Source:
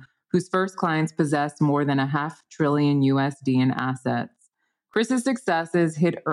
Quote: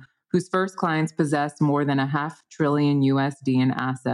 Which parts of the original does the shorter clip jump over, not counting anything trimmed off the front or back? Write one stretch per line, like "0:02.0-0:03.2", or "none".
none